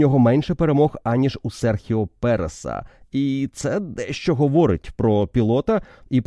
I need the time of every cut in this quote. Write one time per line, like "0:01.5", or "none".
none